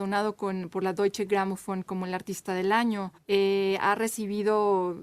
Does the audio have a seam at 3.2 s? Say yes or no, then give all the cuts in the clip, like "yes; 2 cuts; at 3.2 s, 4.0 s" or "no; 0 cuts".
yes; 1 cut; at 3.2 s